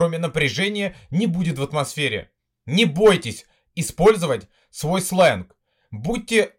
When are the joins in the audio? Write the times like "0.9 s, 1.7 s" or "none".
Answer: none